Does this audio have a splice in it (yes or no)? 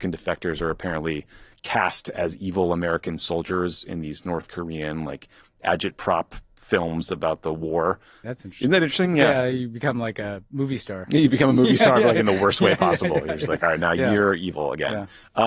yes